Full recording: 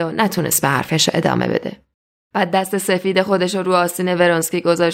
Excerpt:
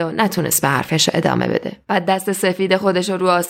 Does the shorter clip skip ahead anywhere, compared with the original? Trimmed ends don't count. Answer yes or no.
yes